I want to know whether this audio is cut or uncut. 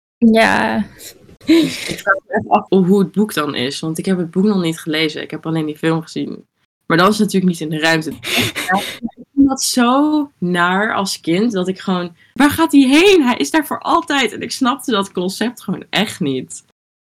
cut